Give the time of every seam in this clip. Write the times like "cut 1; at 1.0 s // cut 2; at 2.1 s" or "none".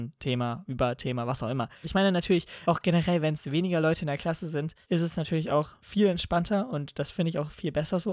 cut 1; at 1.8 s // cut 2; at 4.8 s